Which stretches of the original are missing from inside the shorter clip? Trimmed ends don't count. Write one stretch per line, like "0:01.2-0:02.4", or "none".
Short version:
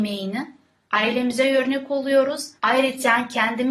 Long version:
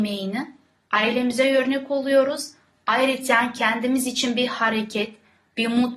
0:02.6-0:02.8